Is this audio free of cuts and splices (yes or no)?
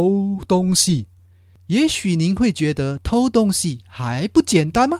yes